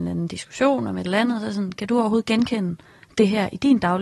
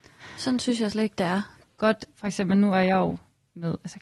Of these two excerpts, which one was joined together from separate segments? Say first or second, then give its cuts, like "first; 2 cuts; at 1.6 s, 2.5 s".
second; 1 cut; at 1.6 s